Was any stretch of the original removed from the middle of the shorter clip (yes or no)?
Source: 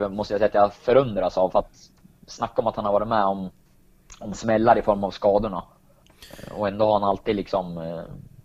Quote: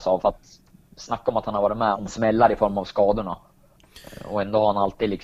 yes